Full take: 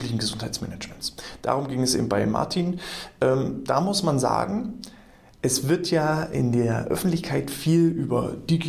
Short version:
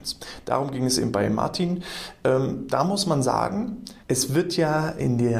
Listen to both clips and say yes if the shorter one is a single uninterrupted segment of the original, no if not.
no